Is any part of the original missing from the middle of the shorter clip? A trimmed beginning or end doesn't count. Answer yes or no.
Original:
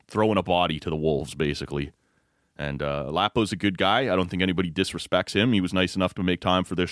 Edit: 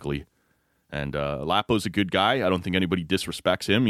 no